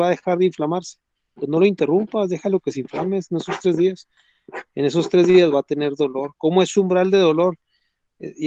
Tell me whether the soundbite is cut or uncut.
uncut